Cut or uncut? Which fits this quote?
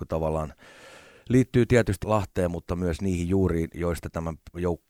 cut